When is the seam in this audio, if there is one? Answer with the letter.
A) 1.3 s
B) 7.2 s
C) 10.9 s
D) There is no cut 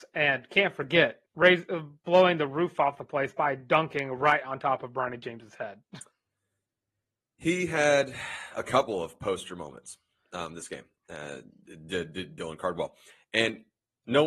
A